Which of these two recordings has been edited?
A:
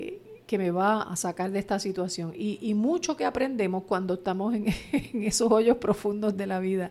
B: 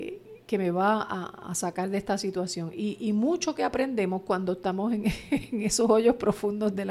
A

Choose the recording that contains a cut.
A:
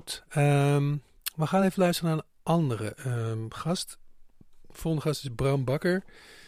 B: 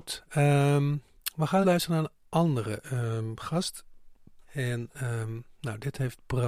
B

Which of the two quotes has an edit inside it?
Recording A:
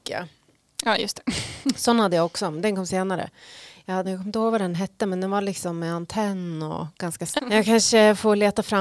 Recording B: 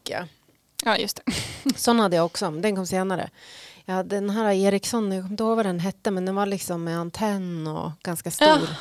A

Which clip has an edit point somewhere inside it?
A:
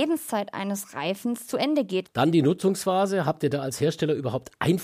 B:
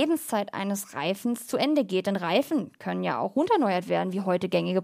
A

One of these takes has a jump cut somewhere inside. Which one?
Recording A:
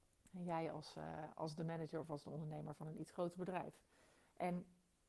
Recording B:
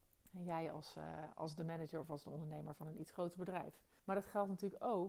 B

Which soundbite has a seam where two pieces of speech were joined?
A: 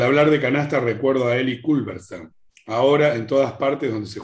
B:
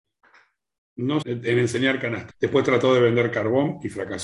B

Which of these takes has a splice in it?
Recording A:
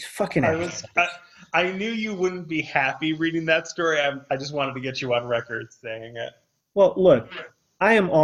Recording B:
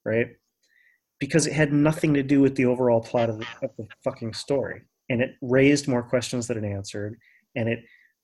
B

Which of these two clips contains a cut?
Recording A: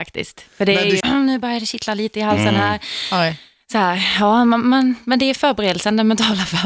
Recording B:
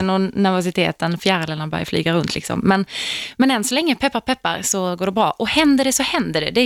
A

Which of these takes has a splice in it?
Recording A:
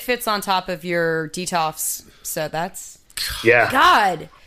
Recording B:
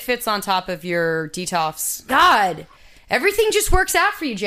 B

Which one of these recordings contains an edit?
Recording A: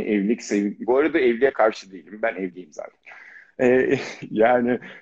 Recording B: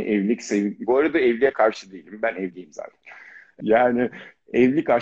B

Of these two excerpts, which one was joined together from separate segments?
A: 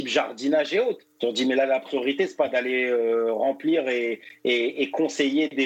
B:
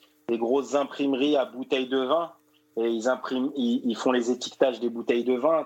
A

